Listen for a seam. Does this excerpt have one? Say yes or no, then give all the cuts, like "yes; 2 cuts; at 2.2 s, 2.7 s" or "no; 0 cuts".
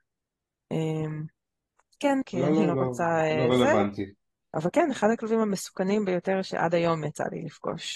yes; 2 cuts; at 2.2 s, 4.5 s